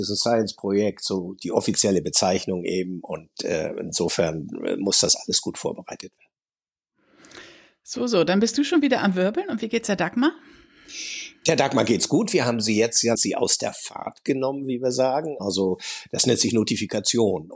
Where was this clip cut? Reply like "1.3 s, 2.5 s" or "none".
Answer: 13.1 s, 15.4 s